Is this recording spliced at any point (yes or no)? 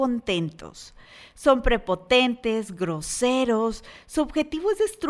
no